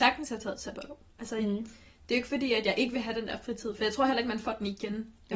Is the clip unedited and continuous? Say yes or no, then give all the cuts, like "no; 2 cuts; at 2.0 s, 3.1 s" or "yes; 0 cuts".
yes; 0 cuts